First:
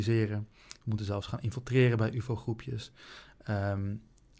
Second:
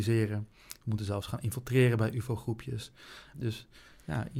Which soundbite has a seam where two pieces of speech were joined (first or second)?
second